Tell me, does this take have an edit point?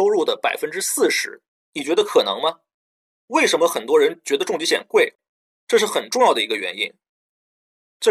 no; 0 cuts

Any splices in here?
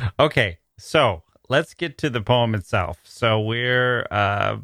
no; 0 cuts

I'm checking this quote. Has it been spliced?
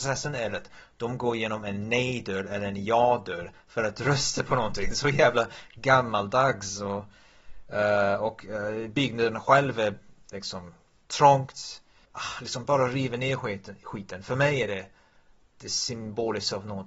no; 0 cuts

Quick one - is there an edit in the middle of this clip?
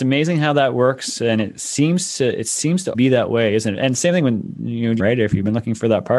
yes; 2 cuts; at 2.9 s, 5.0 s

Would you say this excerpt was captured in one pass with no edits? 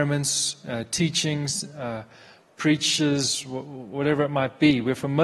yes; 0 cuts

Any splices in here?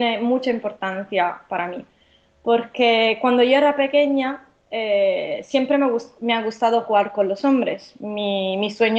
no; 0 cuts

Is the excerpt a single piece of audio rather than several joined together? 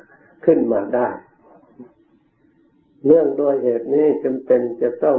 yes; 0 cuts

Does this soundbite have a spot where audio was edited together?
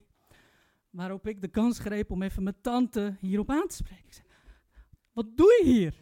yes; 1 cut; at 5.0 s

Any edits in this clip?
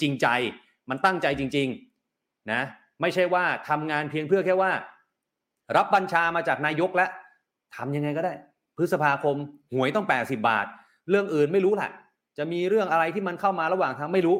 no; 0 cuts

